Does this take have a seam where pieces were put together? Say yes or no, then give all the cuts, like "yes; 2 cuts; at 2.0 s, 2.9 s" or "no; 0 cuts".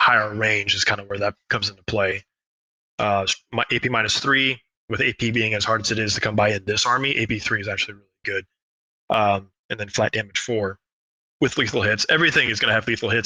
no; 0 cuts